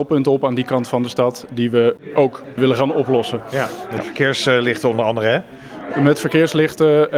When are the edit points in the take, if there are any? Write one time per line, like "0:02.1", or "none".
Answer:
none